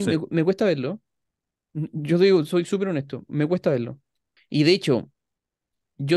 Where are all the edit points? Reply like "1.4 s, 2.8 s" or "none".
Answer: 4.4 s